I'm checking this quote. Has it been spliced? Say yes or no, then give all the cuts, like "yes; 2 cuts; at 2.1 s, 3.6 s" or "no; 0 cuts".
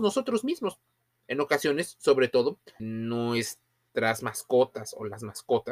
yes; 1 cut; at 2.8 s